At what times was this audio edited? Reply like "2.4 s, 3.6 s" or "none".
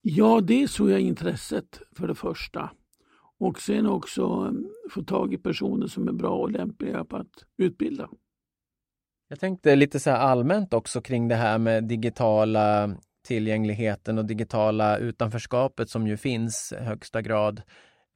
none